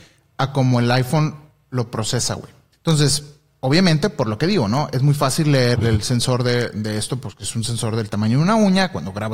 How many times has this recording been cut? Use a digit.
2